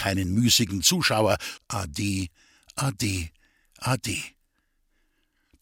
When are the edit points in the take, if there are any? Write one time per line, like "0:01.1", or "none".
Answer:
0:01.6